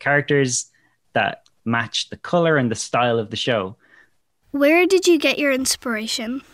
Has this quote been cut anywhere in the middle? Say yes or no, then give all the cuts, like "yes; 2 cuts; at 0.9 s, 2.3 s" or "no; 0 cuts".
yes; 1 cut; at 4.4 s